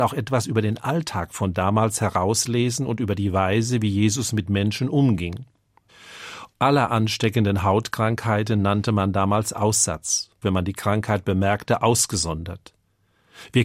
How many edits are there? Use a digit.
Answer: 2